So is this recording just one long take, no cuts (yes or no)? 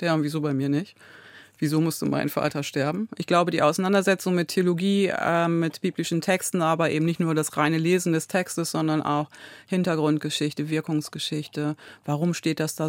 no